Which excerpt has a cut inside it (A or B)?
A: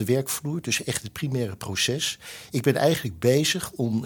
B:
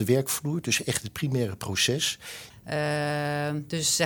B